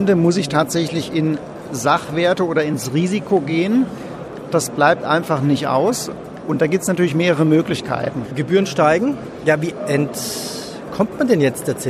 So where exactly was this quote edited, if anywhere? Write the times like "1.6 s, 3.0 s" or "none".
8.2 s